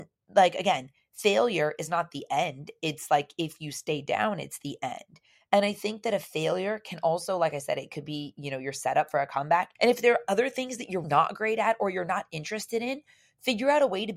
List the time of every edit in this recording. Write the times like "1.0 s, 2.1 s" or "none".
9.7 s, 11.0 s